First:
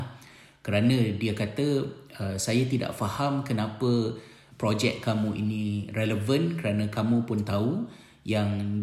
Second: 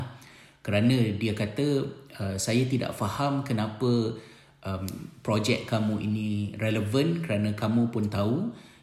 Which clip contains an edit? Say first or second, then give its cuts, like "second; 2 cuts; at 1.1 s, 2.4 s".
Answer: first; 1 cut; at 4.5 s